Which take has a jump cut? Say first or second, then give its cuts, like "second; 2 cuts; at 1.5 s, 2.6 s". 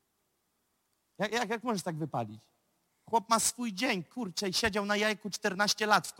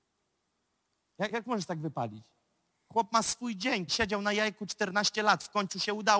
second; 2 cuts; at 1.3 s, 3.9 s